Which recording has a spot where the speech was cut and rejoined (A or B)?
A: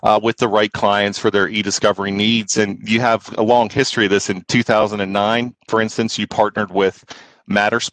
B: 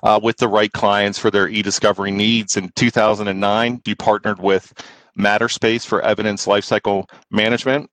B